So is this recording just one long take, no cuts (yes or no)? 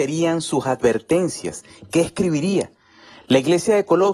yes